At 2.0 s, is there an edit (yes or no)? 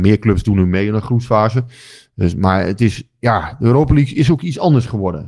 no